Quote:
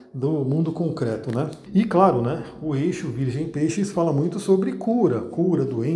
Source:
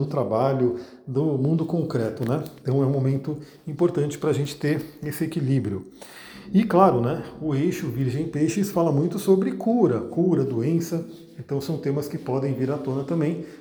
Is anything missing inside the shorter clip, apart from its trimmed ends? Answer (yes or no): yes